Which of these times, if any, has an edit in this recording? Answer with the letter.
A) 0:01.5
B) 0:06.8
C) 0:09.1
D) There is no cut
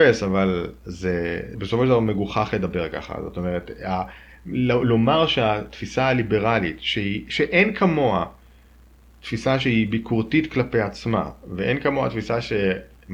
A